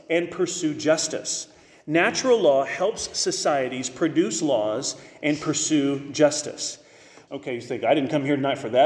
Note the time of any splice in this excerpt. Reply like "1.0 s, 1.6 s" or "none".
7.3 s